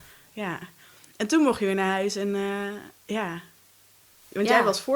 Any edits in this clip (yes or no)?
yes